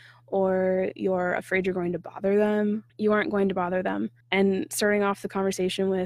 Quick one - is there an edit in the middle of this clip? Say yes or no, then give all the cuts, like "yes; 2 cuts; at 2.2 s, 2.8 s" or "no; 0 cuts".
yes; 2 cuts; at 2.9 s, 4.2 s